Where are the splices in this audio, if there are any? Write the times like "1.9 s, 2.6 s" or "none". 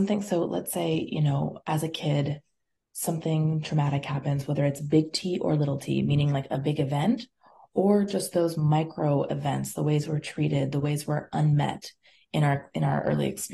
none